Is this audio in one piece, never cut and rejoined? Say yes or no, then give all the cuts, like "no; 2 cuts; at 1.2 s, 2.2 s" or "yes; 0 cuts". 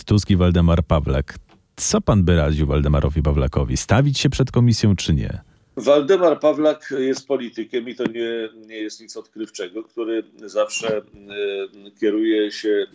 yes; 0 cuts